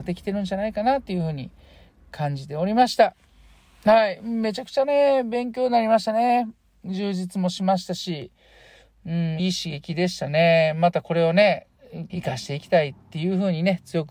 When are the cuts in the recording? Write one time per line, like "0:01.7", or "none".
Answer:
0:09.4
0:12.1